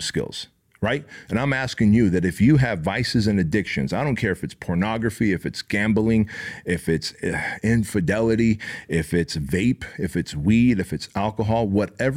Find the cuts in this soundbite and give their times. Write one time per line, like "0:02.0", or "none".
0:01.3